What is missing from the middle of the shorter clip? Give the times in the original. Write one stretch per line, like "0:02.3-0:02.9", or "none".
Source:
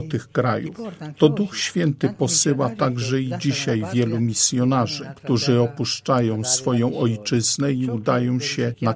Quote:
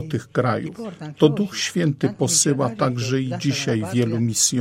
none